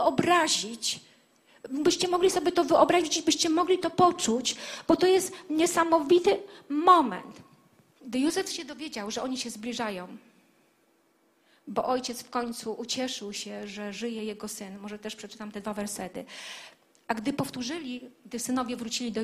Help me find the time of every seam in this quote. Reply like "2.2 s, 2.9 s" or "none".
none